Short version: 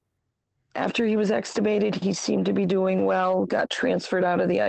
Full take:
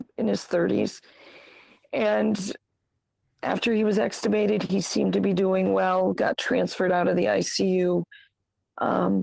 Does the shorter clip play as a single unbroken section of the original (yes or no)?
yes